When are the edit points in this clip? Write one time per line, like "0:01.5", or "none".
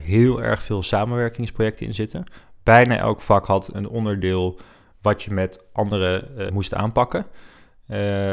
0:03.7
0:06.5